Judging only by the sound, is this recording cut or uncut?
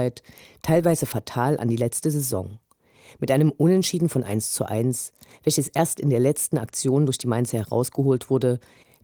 uncut